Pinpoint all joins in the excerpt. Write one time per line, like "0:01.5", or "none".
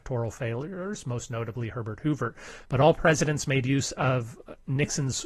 none